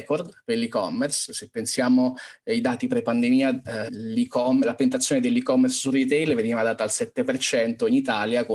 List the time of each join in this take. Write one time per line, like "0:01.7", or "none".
0:01.3
0:03.9